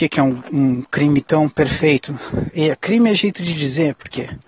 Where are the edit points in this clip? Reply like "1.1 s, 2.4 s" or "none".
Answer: none